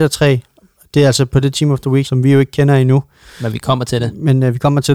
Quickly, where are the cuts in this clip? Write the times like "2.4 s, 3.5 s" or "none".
2.0 s